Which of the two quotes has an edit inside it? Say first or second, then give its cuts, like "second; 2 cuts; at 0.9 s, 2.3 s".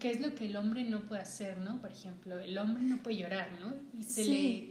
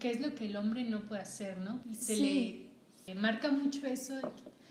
second; 2 cuts; at 1.8 s, 3.1 s